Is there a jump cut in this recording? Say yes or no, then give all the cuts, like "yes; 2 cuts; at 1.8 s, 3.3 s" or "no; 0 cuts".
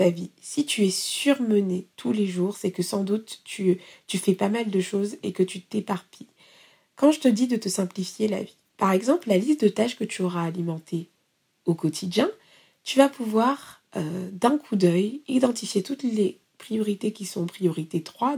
no; 0 cuts